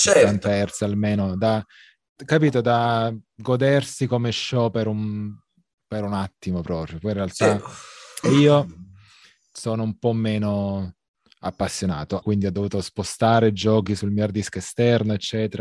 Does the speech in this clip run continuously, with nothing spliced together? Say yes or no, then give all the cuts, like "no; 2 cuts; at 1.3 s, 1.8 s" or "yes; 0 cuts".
no; 2 cuts; at 8.2 s, 12.2 s